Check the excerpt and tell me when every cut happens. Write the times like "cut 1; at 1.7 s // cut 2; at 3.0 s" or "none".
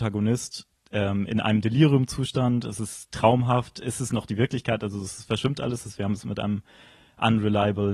none